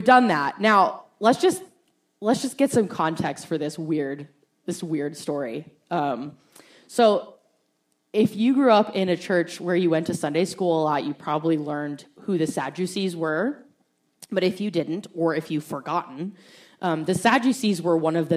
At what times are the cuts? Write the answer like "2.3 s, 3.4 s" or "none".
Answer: none